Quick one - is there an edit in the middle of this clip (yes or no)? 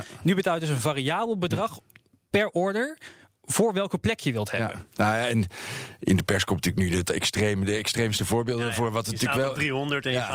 no